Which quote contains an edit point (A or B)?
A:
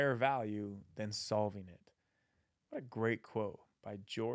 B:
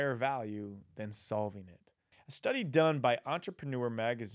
B